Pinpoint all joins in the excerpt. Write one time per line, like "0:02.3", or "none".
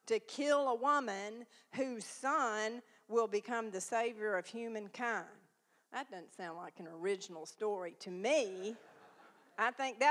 none